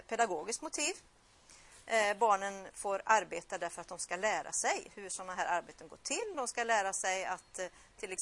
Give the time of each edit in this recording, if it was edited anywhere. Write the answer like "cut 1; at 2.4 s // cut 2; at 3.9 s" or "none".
cut 1; at 6.3 s